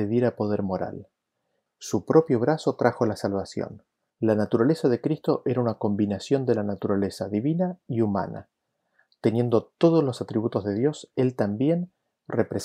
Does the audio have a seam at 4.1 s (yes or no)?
yes